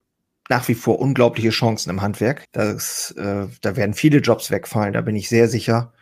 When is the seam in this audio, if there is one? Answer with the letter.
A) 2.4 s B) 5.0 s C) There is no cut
A